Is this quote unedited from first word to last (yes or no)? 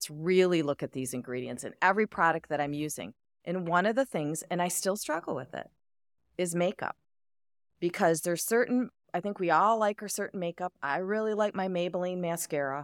yes